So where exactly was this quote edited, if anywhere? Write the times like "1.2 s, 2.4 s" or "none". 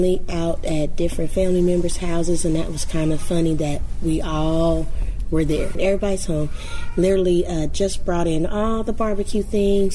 5.8 s

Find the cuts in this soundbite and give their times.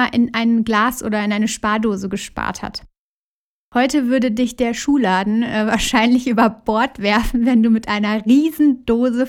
none

